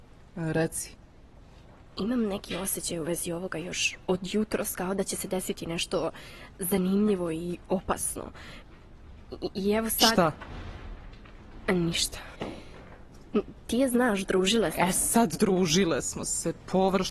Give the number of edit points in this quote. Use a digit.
0